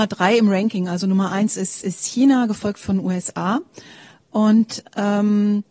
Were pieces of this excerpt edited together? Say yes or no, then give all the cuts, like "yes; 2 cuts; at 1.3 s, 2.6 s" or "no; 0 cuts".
no; 0 cuts